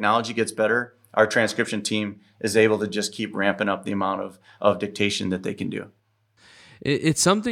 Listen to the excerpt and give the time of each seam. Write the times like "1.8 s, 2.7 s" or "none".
none